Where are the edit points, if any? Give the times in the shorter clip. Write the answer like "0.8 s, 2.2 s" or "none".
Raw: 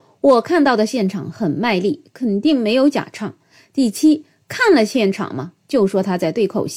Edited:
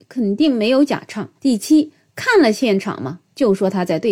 1.4 s